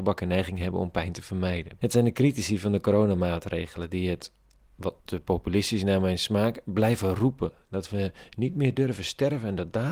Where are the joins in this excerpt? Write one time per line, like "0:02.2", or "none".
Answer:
0:01.8
0:05.0

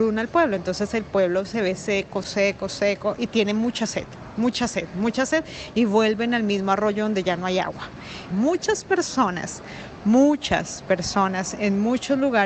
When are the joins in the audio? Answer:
0:02.2
0:08.3

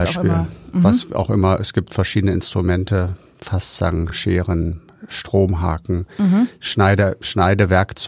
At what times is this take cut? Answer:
none

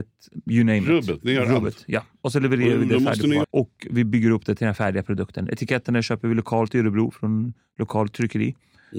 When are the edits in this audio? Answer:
0:03.4

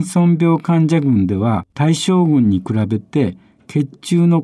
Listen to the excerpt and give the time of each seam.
0:01.7

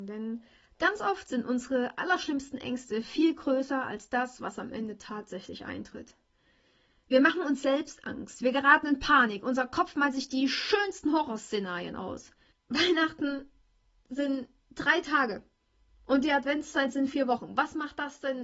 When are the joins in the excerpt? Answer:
0:12.5

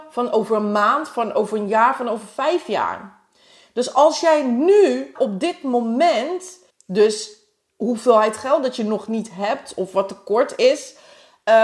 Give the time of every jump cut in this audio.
0:05.2
0:06.7

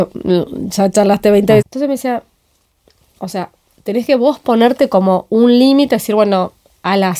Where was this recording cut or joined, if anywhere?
0:01.6

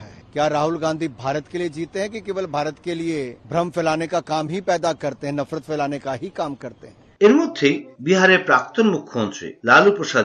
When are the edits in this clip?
0:03.4

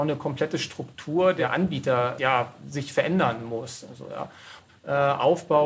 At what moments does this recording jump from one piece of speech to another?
0:04.7

